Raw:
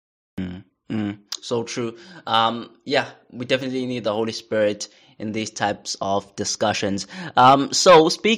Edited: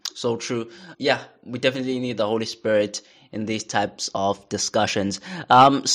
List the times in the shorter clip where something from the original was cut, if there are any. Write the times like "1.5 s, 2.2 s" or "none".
0.9 s